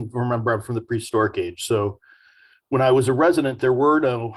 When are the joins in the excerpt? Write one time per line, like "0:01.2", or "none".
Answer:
none